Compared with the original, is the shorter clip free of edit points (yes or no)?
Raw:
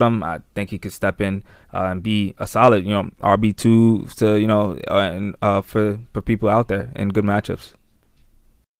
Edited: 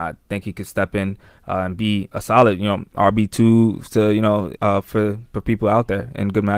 no